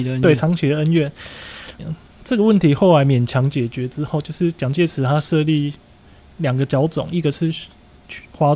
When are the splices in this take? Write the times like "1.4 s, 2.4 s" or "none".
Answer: 1.8 s